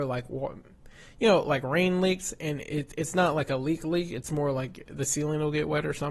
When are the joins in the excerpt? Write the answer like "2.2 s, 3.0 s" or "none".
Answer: none